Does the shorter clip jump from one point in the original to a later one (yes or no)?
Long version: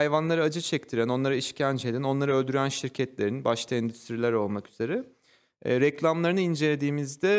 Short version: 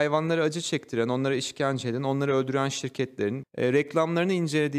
yes